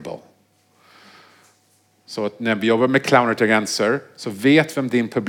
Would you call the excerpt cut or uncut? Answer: uncut